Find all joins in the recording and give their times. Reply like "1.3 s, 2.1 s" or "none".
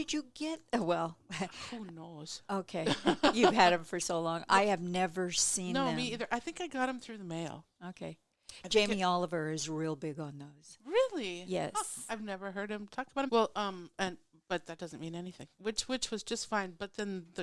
13.3 s, 15.5 s